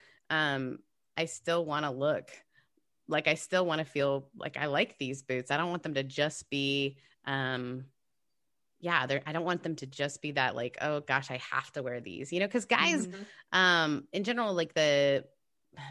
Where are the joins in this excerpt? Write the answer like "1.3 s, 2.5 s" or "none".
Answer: none